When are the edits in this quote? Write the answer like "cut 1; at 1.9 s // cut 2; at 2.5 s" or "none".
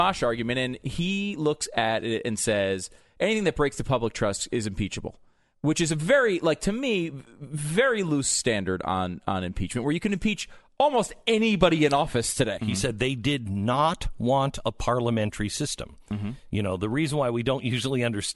cut 1; at 12.6 s